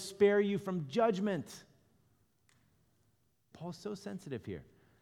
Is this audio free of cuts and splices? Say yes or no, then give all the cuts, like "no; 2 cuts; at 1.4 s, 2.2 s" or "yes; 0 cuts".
no; 1 cut; at 3.5 s